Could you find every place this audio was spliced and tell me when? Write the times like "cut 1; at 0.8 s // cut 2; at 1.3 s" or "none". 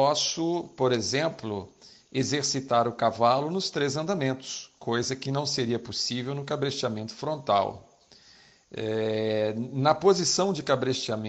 none